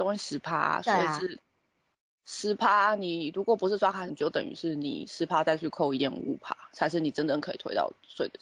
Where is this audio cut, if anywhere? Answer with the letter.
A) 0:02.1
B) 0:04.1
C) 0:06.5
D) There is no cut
B